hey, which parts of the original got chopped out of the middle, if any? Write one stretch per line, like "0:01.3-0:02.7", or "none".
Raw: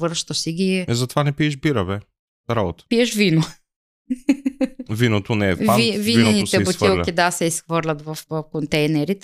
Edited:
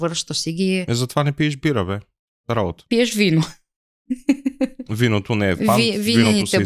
none